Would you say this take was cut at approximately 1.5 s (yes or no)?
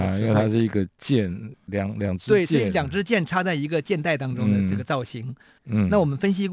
yes